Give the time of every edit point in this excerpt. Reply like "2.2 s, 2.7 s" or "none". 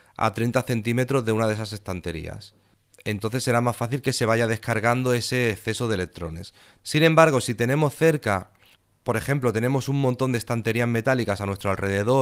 6.8 s